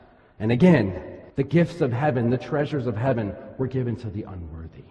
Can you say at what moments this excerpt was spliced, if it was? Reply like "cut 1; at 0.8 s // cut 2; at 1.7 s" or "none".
cut 1; at 1.3 s